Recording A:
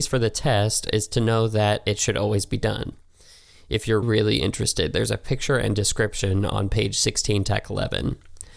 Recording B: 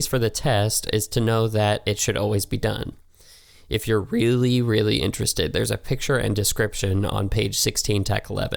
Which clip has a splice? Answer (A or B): A